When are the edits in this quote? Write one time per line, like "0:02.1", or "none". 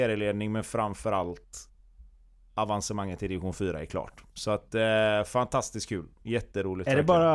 none

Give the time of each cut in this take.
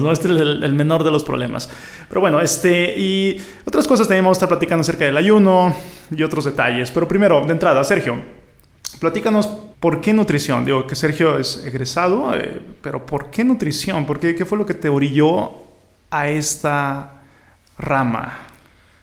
0:09.7

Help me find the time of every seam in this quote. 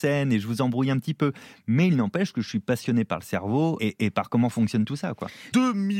0:03.8

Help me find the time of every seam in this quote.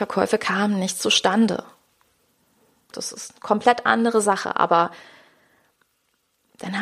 0:02.9

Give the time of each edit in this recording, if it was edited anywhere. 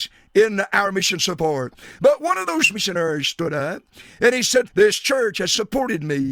0:04.7

